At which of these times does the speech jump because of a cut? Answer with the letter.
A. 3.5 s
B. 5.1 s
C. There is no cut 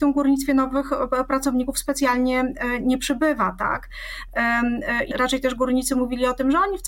B